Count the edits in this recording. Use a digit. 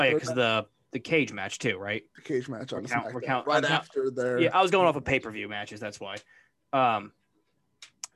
0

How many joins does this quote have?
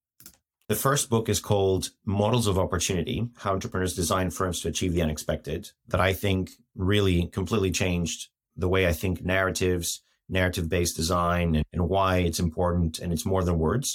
0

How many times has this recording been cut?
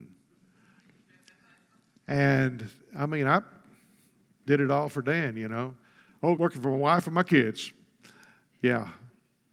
1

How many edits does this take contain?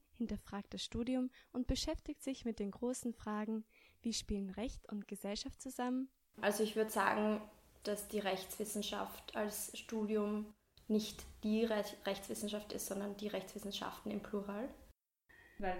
2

